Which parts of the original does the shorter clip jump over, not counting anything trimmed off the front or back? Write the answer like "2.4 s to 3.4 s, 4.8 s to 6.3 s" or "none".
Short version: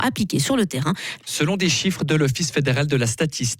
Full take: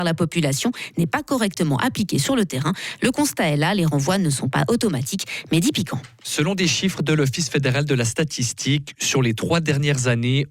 3.0 s to 6.2 s

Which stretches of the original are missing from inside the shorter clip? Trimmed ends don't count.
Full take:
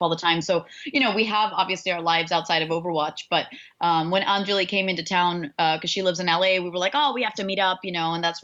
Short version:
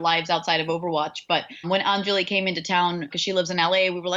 3.7 s to 4.0 s, 5.5 s to 5.8 s

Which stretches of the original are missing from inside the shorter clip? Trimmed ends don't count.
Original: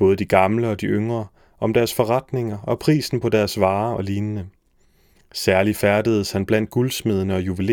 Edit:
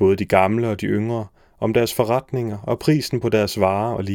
none

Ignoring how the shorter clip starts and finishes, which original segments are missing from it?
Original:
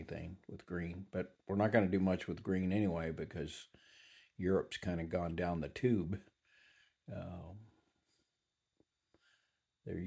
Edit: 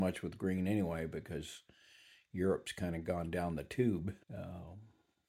6.3 s to 7.0 s

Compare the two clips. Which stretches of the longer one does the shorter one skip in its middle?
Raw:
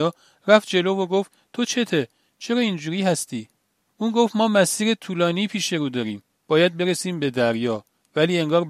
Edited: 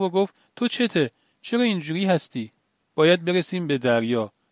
3.8 s to 6.3 s

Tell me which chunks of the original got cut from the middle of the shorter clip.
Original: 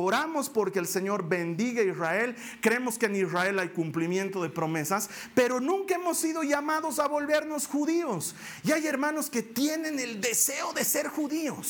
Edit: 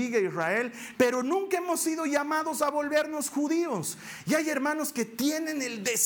2.6 s to 5.3 s

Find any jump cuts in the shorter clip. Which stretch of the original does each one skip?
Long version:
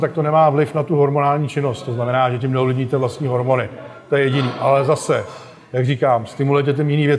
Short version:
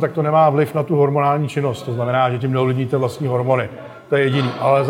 none

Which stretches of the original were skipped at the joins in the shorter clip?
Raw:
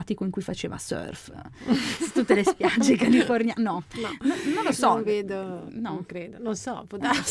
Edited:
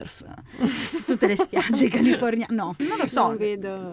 3.9 s to 4.5 s

